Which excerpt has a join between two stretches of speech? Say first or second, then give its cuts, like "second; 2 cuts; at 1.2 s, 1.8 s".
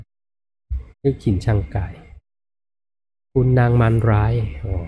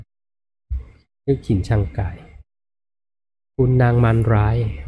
first; 1 cut; at 0.9 s